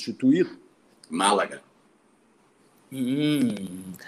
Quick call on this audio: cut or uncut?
cut